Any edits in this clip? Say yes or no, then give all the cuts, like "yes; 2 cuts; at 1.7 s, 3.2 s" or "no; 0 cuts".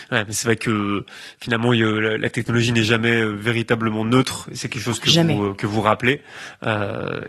no; 0 cuts